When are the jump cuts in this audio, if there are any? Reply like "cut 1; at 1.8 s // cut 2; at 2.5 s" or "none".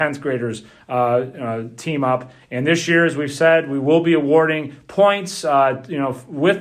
none